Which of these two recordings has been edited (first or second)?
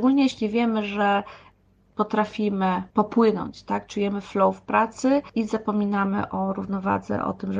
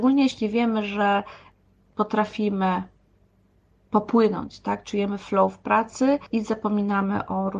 first